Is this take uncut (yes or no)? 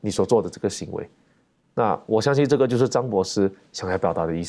yes